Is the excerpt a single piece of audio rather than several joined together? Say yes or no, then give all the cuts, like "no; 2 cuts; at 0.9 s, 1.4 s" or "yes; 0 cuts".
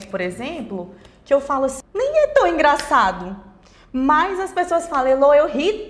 no; 1 cut; at 1.8 s